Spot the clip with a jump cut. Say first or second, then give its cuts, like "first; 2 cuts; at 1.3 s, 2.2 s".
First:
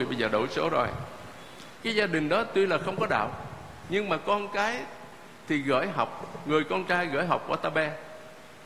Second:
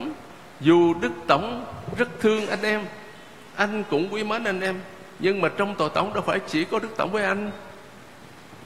first; 1 cut; at 1.8 s